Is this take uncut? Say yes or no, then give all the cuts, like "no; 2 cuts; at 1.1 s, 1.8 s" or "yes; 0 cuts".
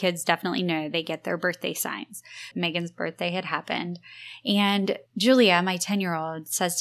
no; 2 cuts; at 2.5 s, 5.1 s